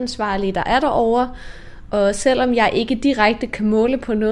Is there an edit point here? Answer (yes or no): no